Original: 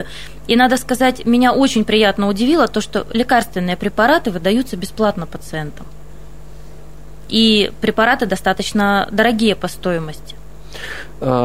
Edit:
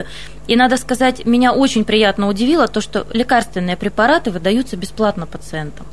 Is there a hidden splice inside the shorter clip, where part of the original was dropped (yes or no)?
no